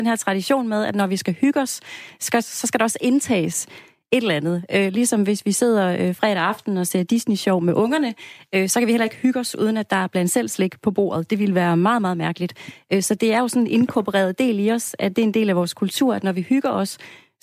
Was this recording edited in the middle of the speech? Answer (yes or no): no